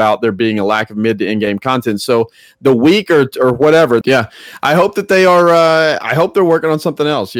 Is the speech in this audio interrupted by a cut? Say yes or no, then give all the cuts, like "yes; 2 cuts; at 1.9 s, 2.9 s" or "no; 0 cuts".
yes; 1 cut; at 4.0 s